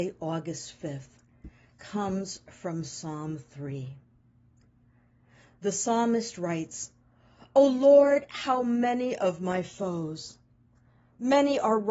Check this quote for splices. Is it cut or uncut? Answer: uncut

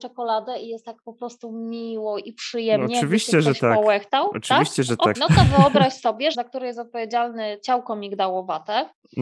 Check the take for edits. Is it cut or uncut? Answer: cut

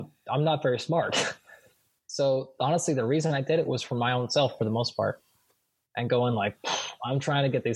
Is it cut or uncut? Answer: uncut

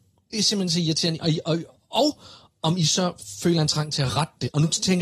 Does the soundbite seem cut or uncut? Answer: uncut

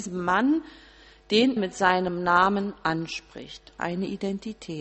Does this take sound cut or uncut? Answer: cut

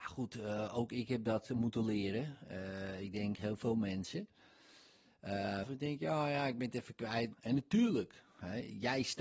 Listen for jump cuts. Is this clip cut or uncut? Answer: cut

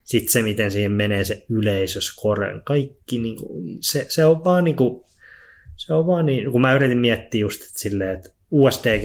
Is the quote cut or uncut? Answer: uncut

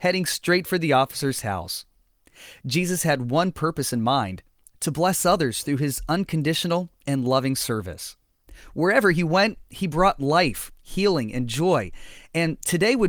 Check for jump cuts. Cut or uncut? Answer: uncut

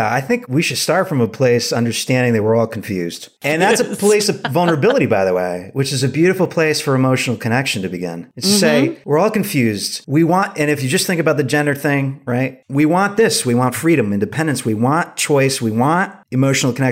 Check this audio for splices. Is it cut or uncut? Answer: uncut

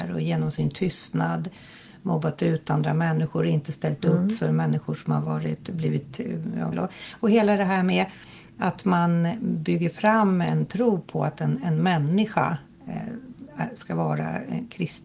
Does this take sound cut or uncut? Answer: cut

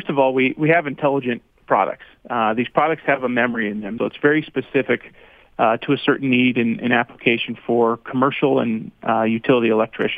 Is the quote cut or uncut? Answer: cut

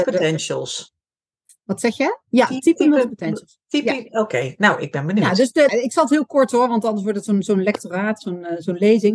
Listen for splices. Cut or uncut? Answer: cut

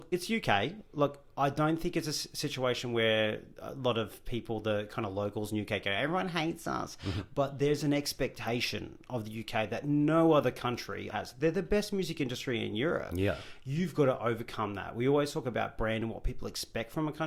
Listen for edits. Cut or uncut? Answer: cut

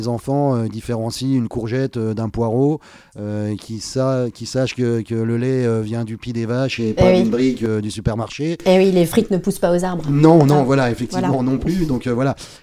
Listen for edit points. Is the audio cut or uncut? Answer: uncut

